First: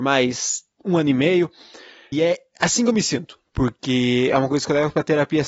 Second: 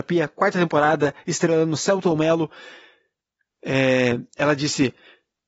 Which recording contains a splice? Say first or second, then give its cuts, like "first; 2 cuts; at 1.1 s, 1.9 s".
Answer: first; 2 cuts; at 2.1 s, 3.5 s